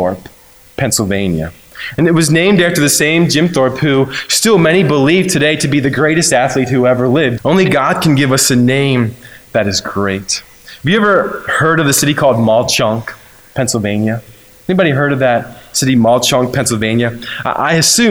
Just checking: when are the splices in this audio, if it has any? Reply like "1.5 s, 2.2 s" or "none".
7.4 s